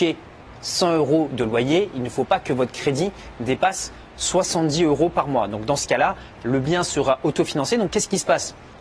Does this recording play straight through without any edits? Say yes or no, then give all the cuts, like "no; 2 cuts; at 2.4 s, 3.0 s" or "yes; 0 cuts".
yes; 0 cuts